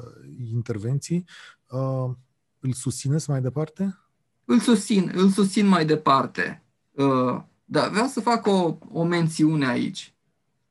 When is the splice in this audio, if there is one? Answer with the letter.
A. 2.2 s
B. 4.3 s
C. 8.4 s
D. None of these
D